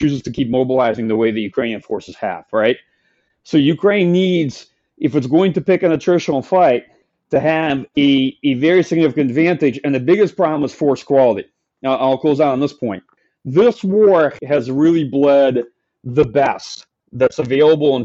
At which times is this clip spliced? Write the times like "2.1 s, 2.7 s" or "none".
none